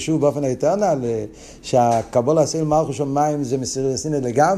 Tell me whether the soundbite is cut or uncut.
uncut